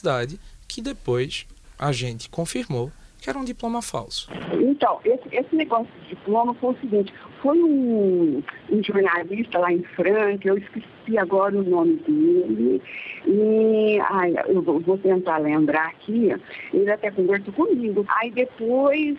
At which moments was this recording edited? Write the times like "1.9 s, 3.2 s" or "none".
18.1 s